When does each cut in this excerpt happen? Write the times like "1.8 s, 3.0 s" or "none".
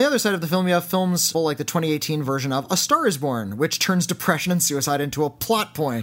1.3 s